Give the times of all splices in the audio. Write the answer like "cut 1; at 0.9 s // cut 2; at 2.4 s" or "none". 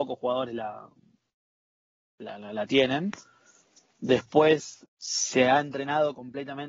none